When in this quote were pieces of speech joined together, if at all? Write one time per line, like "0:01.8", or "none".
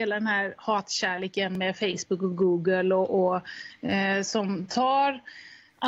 none